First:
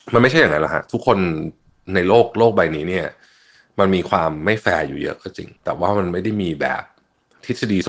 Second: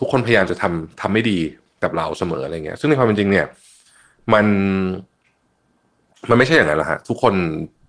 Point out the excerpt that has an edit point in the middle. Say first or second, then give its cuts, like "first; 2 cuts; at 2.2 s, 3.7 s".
first; 1 cut; at 5.6 s